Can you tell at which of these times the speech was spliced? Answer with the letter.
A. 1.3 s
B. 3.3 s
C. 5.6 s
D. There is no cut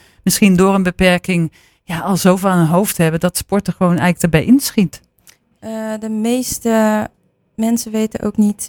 C